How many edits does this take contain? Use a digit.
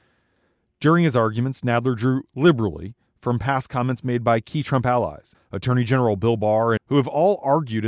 2